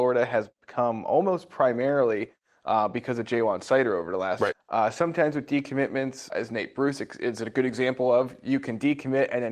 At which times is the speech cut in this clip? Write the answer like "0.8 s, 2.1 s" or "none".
4.5 s, 6.3 s